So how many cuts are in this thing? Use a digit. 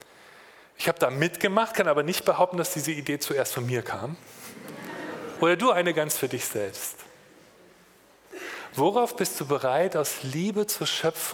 1